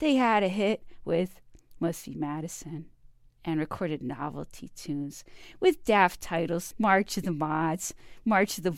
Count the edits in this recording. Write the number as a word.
one